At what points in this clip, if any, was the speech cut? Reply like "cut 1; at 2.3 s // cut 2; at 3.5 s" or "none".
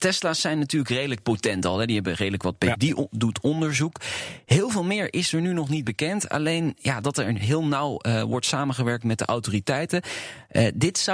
cut 1; at 2.7 s

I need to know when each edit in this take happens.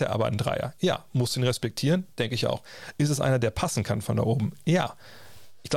none

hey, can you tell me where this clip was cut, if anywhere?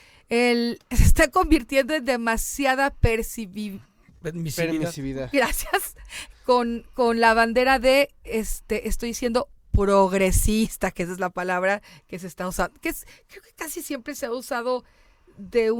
none

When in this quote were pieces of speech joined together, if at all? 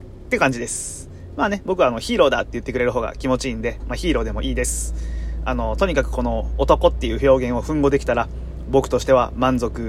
none

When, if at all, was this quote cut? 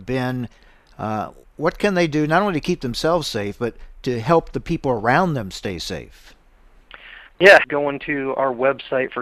cut 1; at 7.6 s

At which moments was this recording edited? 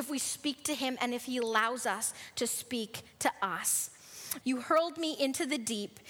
cut 1; at 4.4 s

